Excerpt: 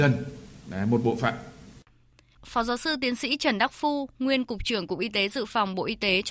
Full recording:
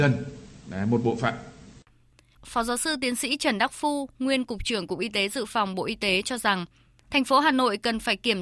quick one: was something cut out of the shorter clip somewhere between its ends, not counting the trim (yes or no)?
no